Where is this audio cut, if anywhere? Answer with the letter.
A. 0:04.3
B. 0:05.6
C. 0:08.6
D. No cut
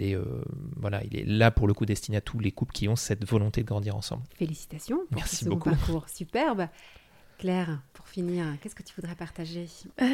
A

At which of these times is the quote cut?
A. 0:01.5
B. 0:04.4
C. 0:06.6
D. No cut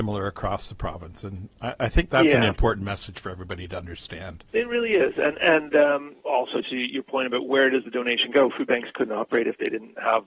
C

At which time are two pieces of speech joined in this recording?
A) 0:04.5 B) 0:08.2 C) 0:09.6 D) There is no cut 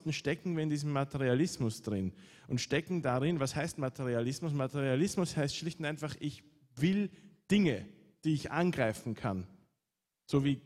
D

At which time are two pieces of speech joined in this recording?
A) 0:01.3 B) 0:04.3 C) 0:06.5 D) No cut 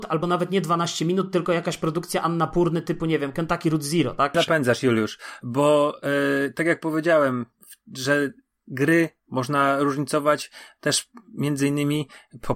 B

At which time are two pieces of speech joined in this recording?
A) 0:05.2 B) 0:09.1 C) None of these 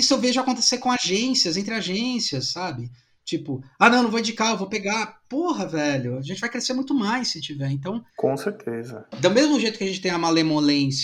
B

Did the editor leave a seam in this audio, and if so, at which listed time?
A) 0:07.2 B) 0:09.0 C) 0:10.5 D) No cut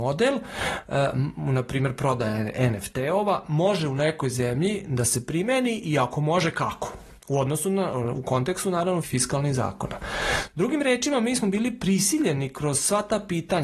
B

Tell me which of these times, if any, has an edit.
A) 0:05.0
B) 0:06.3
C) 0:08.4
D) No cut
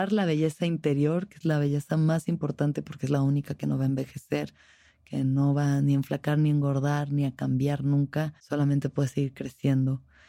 C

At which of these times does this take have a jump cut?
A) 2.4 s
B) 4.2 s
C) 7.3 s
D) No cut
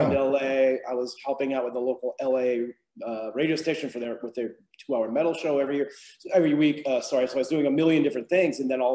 D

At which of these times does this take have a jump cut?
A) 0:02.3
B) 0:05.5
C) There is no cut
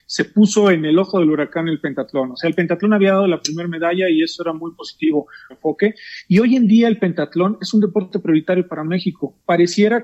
B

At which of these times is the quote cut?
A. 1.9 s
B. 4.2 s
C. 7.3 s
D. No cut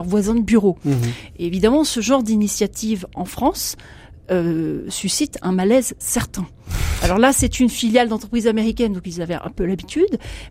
D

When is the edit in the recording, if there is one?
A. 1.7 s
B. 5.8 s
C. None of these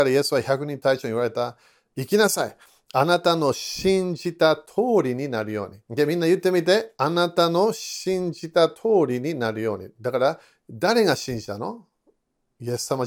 B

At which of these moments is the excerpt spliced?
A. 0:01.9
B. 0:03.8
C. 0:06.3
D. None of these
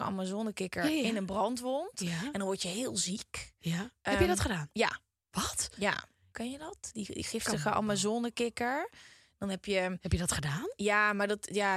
C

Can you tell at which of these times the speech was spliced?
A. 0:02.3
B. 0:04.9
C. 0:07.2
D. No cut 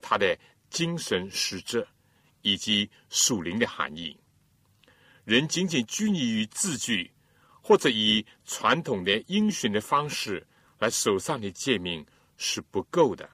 D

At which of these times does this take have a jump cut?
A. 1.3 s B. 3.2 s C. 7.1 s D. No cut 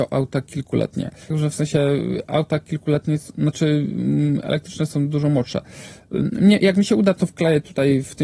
A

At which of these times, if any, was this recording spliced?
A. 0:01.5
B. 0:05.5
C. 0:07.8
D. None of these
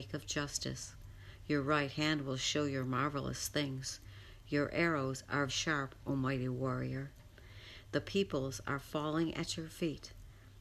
B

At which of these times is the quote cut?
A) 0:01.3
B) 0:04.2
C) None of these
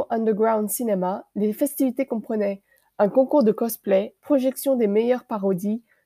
B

